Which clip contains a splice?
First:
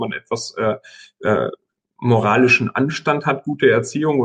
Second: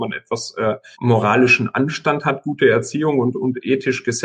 second; 1 cut; at 0.9 s

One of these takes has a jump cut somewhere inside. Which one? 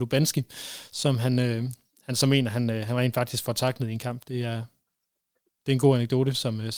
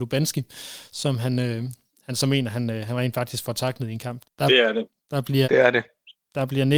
second; 2 cuts; at 4.2 s, 5.4 s

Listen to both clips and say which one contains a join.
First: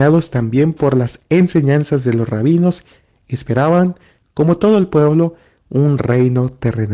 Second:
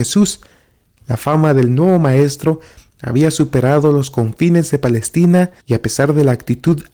second; 2 cuts; at 1.0 s, 5.6 s

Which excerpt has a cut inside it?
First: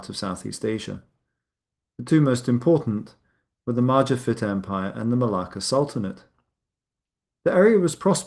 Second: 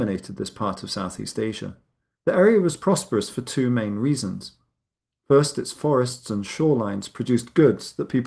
second; 1 cut; at 2.1 s

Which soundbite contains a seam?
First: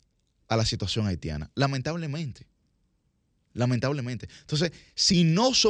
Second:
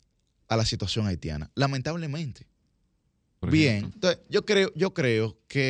second; 1 cut; at 3.4 s

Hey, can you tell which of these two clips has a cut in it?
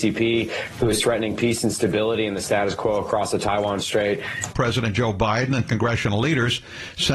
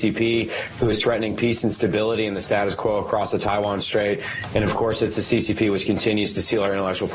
first; 1 cut; at 4.5 s

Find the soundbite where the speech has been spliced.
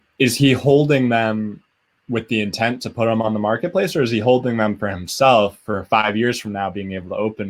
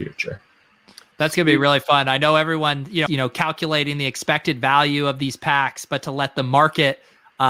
second; 1 cut; at 3.1 s

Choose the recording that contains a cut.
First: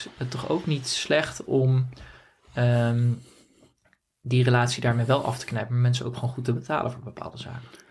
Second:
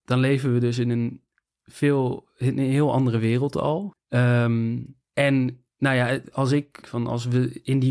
second; 3 cuts; at 3.9 s, 5.1 s, 6.8 s

